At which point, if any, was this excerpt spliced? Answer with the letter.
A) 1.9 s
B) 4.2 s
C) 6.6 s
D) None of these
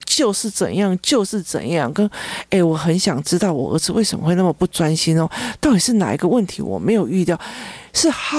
D